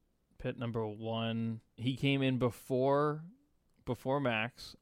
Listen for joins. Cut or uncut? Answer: cut